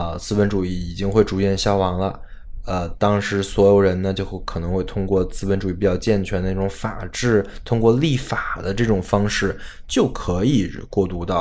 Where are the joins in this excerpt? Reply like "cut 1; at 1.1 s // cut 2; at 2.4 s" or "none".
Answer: none